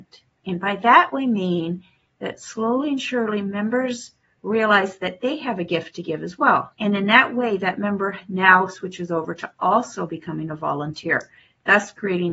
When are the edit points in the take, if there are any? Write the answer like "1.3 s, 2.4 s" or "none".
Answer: 6.7 s